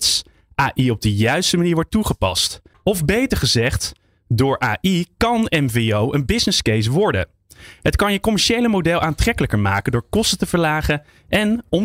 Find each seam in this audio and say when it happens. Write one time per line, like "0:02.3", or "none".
0:02.7